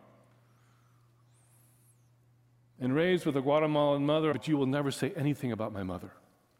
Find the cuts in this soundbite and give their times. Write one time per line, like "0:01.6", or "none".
0:04.3